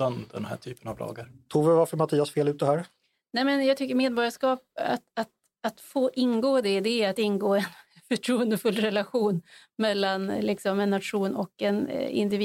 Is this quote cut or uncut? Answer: uncut